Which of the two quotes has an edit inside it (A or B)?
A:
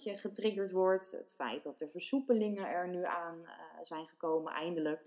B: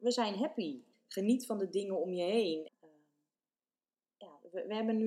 B